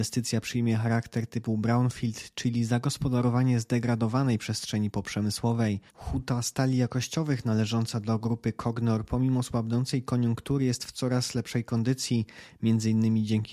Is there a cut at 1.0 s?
no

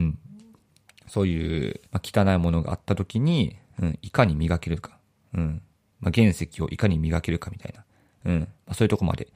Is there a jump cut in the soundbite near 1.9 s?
yes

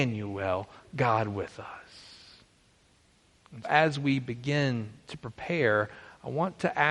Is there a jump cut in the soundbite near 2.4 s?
no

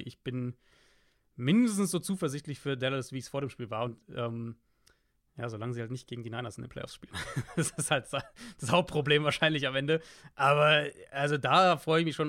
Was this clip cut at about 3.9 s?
no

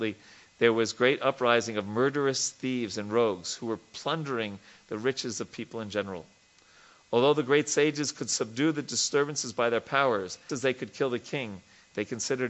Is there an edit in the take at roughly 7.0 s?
no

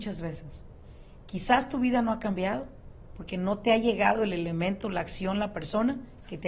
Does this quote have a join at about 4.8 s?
no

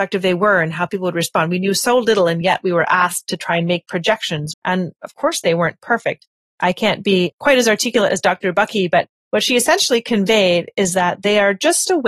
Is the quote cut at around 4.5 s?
yes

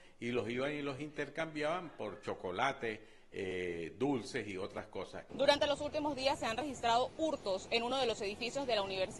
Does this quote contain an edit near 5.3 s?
yes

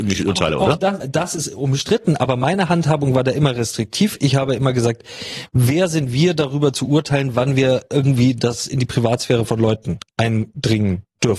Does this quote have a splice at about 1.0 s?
yes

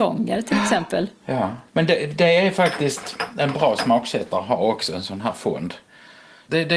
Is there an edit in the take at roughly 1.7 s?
yes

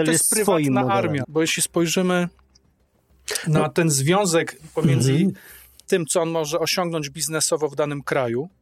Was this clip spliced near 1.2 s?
yes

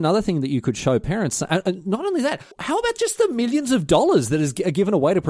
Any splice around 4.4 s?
no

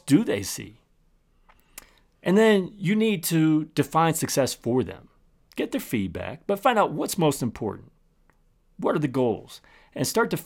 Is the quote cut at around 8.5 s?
no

